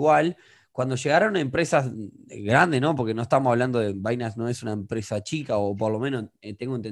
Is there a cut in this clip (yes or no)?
no